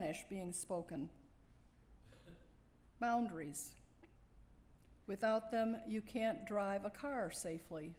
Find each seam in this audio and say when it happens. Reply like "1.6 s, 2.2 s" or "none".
5.0 s